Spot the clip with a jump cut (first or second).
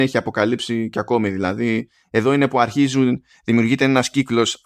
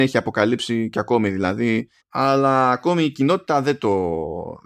second